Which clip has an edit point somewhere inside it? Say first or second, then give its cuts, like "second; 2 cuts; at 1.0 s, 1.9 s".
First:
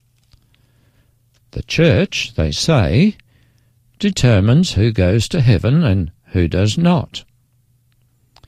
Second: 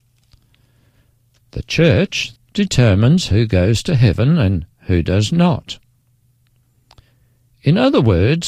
second; 1 cut; at 2.3 s